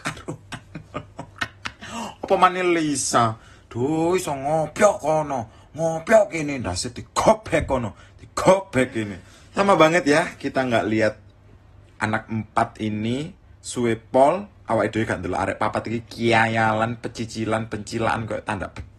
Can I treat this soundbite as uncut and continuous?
yes; 0 cuts

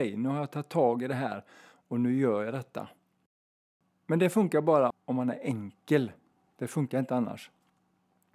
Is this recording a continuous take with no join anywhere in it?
no; 1 cut; at 4.9 s

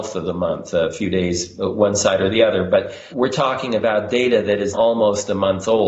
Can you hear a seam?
yes; 2 cuts; at 3.1 s, 4.7 s

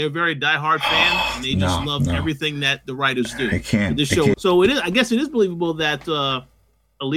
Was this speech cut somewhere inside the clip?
yes; 1 cut; at 4.3 s

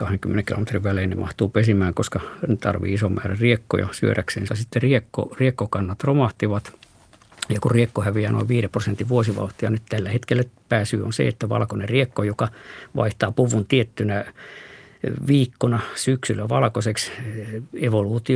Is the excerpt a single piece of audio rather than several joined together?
no; 1 cut; at 4.5 s

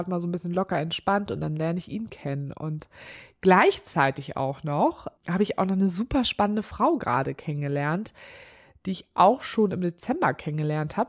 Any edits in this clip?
no; 0 cuts

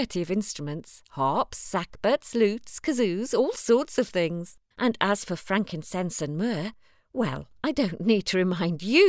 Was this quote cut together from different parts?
yes; 1 cut; at 4.7 s

